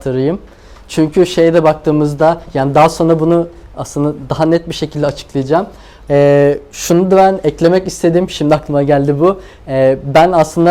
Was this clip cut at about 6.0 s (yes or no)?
yes